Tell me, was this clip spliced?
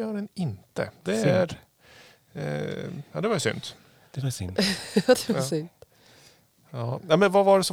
no; 0 cuts

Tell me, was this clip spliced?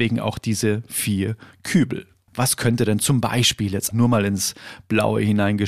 yes; 2 cuts; at 2.3 s, 3.9 s

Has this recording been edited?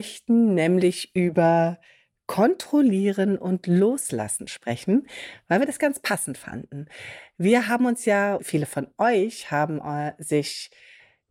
yes; 1 cut; at 8.4 s

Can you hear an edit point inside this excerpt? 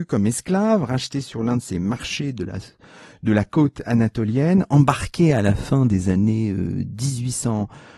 no; 0 cuts

